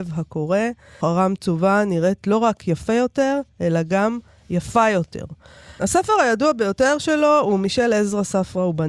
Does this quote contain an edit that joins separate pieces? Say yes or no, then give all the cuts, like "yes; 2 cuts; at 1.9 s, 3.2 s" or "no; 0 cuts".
yes; 2 cuts; at 1.0 s, 5.8 s